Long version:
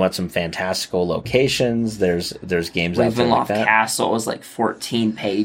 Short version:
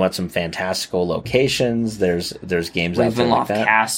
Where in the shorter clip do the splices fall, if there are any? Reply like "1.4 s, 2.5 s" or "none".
none